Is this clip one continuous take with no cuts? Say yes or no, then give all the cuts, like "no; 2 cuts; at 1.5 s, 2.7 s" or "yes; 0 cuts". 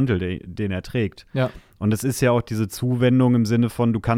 yes; 0 cuts